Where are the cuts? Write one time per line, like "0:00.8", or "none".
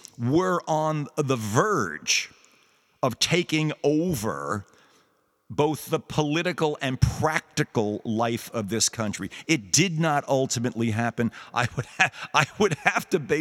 none